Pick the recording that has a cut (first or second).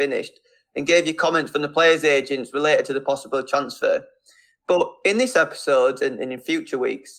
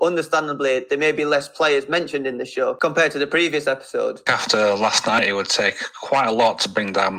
second